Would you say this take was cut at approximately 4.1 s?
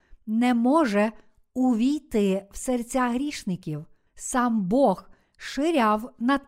yes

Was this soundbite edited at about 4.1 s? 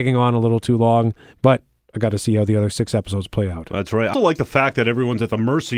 yes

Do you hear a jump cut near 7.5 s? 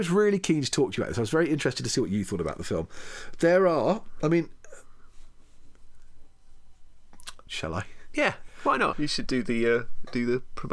yes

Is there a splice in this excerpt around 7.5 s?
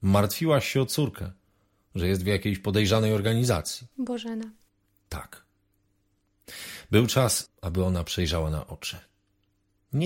yes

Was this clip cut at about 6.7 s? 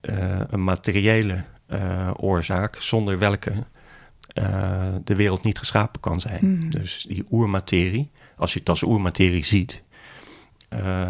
no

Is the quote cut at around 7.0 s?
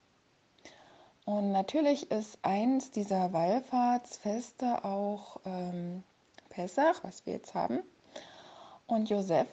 yes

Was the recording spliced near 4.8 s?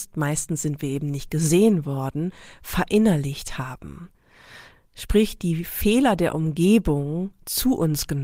no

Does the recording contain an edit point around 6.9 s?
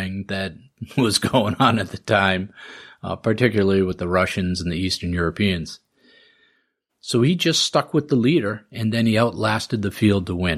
yes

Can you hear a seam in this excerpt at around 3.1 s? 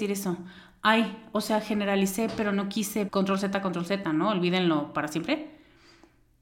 yes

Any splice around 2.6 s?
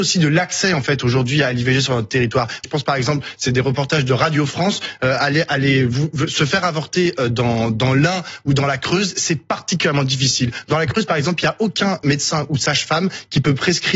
yes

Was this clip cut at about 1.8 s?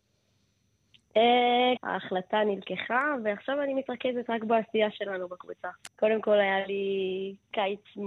yes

